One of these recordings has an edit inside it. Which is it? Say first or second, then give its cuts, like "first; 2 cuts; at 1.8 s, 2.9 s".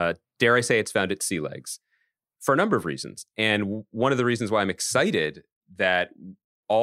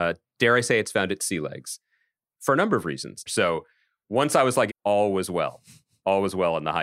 second; 2 cuts; at 3.3 s, 4.7 s